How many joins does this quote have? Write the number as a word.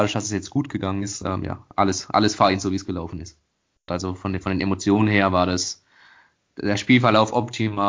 one